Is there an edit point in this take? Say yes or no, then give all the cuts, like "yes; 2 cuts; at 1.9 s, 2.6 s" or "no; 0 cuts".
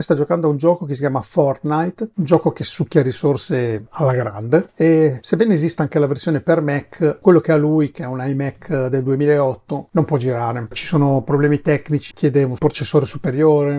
yes; 1 cut; at 12.1 s